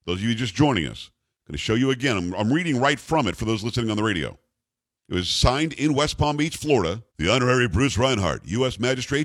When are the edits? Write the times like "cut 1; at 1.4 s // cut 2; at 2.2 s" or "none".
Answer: cut 1; at 5.0 s // cut 2; at 7.1 s